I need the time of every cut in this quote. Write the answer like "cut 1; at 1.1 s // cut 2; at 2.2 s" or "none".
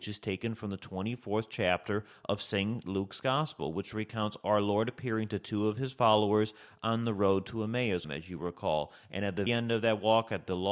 cut 1; at 8.0 s // cut 2; at 9.5 s